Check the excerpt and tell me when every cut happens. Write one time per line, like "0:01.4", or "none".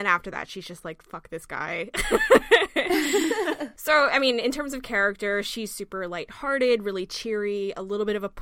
none

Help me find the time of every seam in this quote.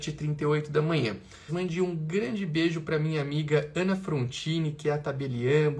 0:01.5

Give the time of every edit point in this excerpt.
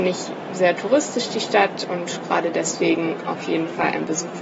none

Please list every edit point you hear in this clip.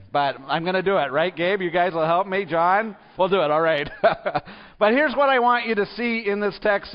0:03.2

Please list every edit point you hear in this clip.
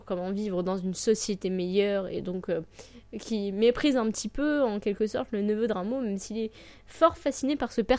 none

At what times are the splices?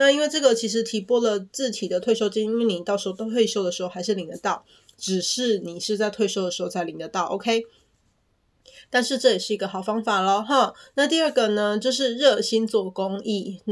none

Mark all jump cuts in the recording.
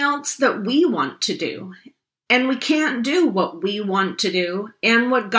none

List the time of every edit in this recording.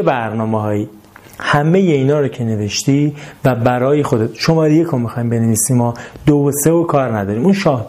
none

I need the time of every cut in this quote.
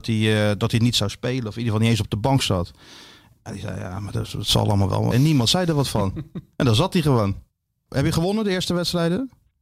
0:05.1
0:07.9

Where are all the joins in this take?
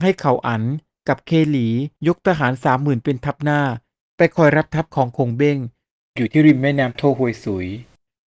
0:02.0

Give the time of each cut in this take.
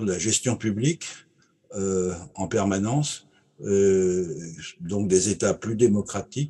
none

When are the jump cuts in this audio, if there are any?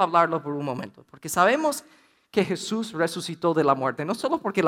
none

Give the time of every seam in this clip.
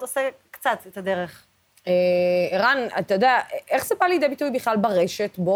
none

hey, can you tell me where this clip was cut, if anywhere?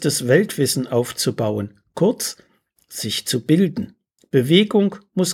0:04.2

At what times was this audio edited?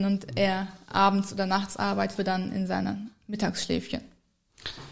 0:02.2

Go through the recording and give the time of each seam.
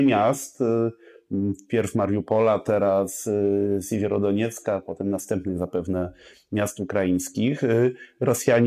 none

